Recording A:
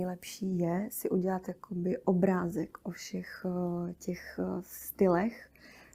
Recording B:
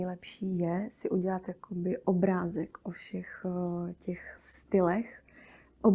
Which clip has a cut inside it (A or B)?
B